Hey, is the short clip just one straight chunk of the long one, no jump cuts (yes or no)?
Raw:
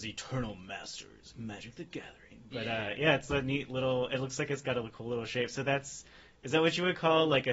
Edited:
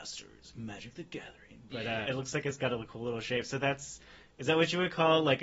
no